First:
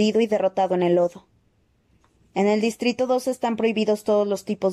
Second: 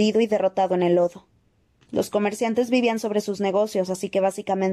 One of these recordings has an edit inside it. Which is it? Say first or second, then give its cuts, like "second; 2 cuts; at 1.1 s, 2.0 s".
second; 1 cut; at 1.8 s